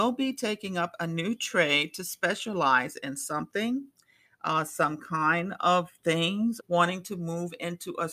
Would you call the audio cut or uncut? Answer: cut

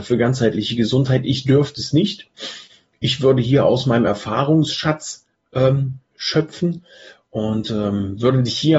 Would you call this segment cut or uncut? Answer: uncut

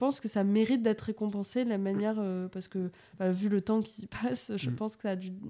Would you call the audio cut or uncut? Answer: uncut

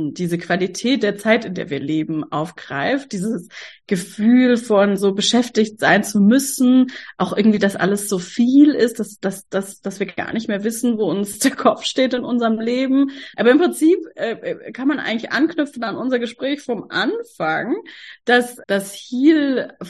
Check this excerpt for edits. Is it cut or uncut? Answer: cut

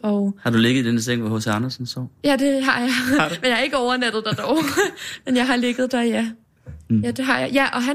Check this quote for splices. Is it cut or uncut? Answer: uncut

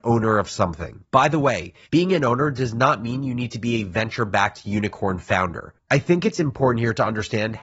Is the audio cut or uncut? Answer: cut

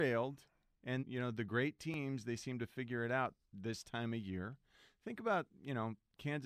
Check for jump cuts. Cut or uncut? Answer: cut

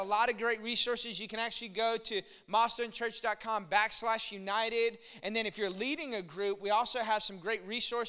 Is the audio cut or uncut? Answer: uncut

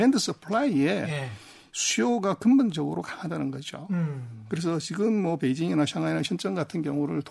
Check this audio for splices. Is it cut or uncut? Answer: uncut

